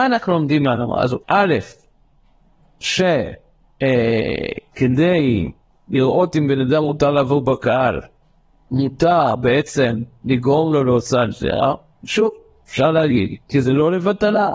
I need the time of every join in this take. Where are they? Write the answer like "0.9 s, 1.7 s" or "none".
1.2 s